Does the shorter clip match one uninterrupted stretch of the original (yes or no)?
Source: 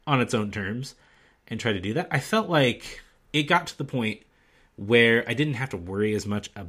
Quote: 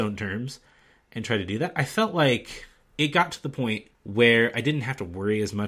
no